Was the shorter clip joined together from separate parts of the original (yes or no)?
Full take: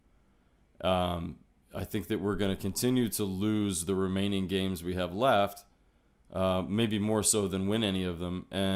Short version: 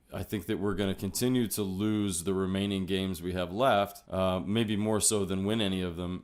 yes